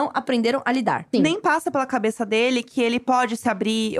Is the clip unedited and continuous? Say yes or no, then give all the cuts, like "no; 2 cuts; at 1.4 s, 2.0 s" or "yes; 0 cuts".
no; 1 cut; at 1.1 s